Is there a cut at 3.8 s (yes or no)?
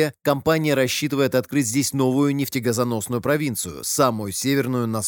no